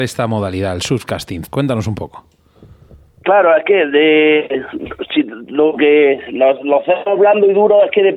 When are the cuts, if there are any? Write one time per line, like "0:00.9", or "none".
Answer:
0:01.4